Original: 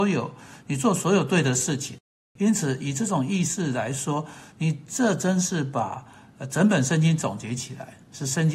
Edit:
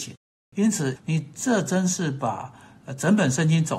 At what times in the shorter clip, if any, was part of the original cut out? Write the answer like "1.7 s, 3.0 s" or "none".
1.0 s